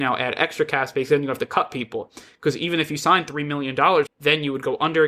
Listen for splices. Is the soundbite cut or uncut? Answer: cut